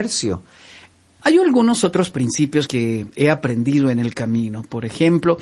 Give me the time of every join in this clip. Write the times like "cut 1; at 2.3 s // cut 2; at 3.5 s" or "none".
cut 1; at 1.2 s // cut 2; at 2.7 s

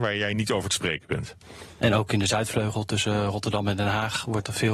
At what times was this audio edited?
cut 1; at 1.8 s

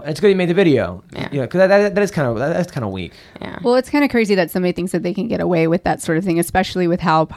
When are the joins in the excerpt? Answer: none

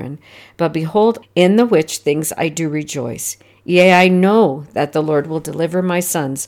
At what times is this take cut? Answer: cut 1; at 1.2 s

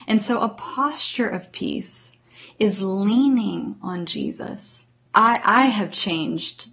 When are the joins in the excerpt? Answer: cut 1; at 5.1 s

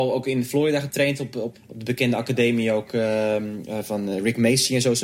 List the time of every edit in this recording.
cut 1; at 1.5 s

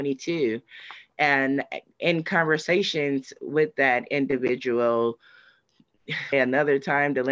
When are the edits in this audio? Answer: cut 1; at 6.3 s

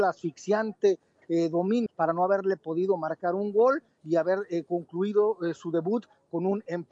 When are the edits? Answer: cut 1; at 1.9 s

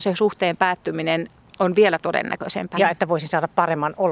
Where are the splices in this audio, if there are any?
cut 1; at 2.8 s

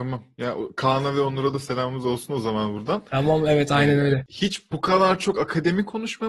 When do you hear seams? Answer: none

